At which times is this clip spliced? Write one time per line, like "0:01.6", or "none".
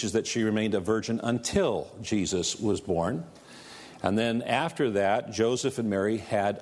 none